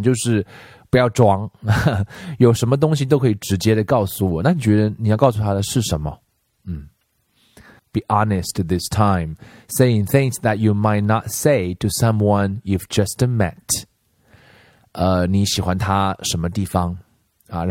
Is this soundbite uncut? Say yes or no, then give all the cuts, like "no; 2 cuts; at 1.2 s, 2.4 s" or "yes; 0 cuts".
no; 2 cuts; at 7.8 s, 14.8 s